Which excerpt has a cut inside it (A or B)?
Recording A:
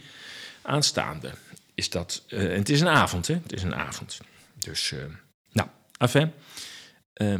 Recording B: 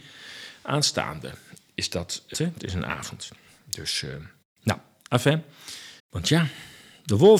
B